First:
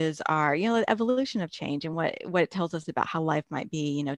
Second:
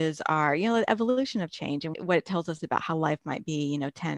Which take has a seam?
second; 1 cut; at 1.9 s

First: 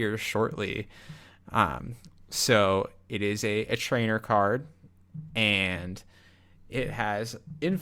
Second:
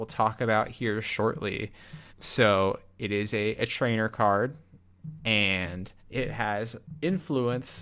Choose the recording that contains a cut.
second; 2 cuts; at 2.1 s, 6.0 s

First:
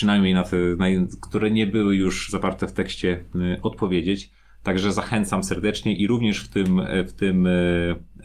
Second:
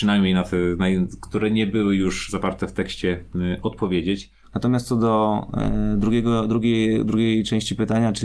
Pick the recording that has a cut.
second; 1 cut; at 4.4 s

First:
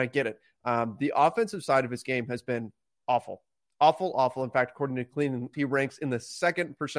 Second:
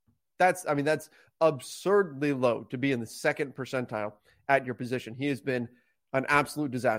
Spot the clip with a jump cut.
first; 2 cuts; at 4.1 s, 5.5 s

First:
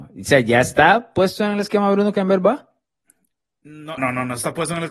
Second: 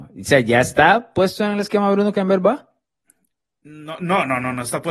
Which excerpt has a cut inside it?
first; 1 cut; at 4.0 s

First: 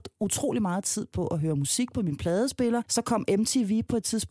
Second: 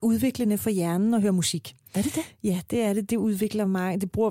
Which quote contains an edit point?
first; 1 cut; at 2.8 s

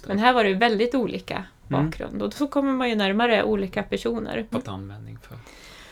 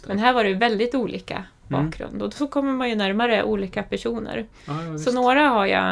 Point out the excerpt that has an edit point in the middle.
first; 1 cut; at 4.5 s

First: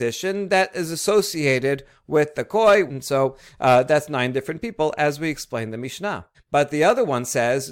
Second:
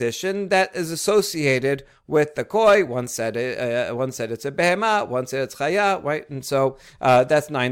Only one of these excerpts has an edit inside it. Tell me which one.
first; 2 cuts; at 2.9 s, 6.3 s

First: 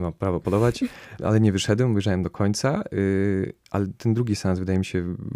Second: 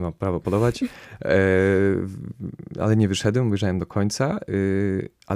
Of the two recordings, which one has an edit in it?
first; 1 cut; at 1.2 s

